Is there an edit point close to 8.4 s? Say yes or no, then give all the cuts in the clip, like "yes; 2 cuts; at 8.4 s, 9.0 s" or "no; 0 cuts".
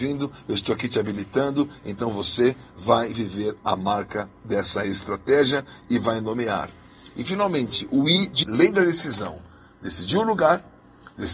yes; 1 cut; at 8.4 s